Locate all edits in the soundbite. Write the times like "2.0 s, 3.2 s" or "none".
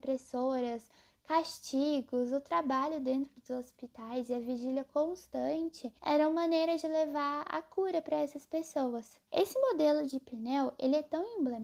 6.0 s, 9.3 s